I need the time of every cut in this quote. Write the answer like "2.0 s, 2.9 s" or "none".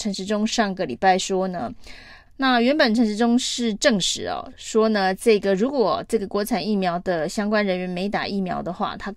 2.3 s